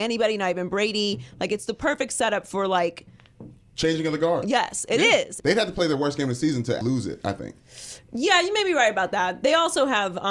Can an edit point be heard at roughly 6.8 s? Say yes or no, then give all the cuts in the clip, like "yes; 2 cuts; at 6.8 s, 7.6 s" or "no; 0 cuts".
yes; 2 cuts; at 5.4 s, 6.8 s